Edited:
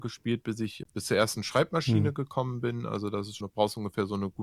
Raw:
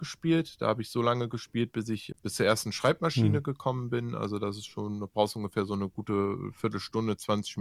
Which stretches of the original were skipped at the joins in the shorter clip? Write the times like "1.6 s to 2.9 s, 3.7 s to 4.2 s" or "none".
4.7 s to 5.0 s